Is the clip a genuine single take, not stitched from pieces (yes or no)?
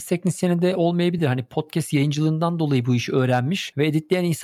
yes